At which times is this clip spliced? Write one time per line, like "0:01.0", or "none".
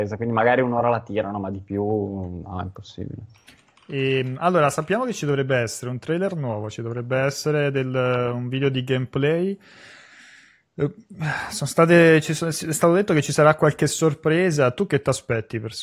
none